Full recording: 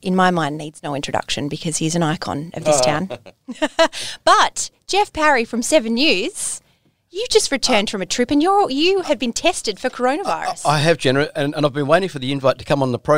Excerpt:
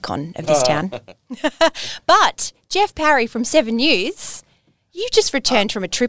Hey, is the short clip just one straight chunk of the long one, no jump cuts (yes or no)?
yes